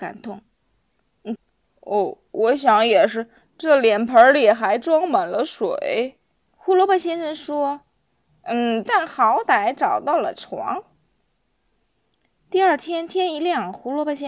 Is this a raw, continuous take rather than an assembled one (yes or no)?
no